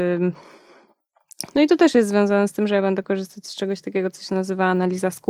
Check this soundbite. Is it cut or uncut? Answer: cut